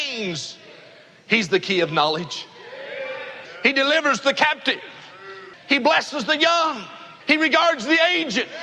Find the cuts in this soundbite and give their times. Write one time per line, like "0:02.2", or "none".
0:05.5
0:07.2